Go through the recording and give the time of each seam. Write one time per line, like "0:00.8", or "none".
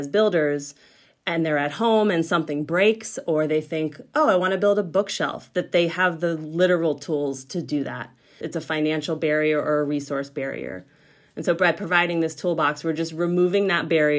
0:08.4